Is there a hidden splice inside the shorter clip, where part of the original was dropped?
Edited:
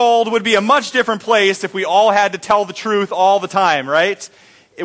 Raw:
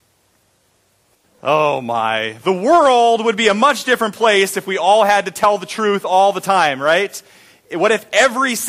no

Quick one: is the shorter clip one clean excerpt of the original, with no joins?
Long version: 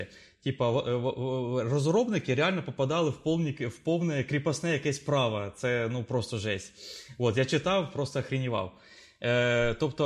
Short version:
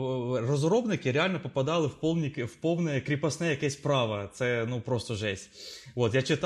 yes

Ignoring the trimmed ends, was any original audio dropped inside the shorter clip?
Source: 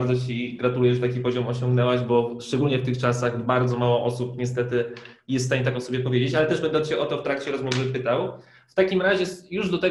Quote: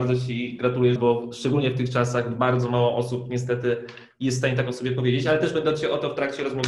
yes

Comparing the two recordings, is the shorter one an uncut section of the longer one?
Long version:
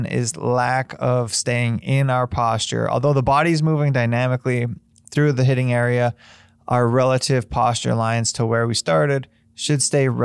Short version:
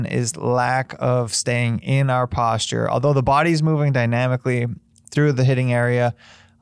yes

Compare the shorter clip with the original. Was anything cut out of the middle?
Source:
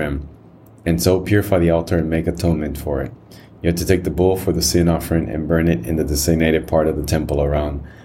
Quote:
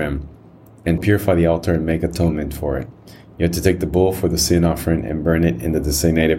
yes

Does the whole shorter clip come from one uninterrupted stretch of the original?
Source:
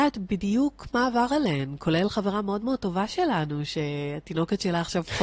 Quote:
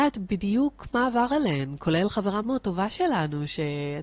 no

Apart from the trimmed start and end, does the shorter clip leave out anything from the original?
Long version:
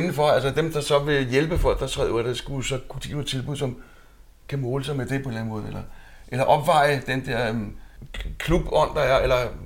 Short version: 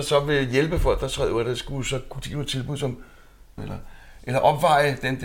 yes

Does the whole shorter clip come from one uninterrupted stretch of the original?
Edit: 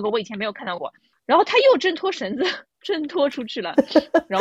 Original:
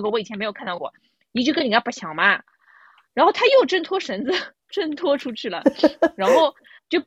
no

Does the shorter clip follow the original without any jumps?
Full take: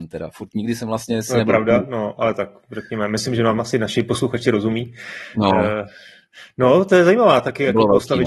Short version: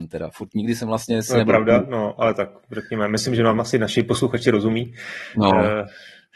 yes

